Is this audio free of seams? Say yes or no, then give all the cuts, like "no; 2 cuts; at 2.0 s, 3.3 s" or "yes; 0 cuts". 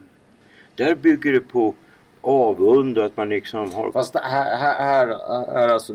yes; 0 cuts